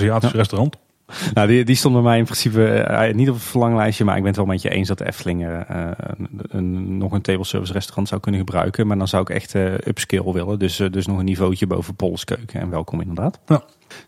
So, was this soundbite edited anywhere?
no; 0 cuts

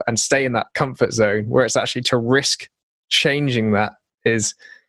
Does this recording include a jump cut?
no; 0 cuts

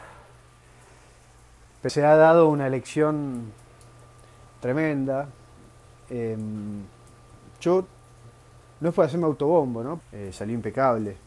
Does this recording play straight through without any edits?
no; 2 cuts; at 1.9 s, 10.0 s

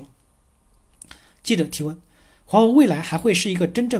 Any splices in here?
no; 0 cuts

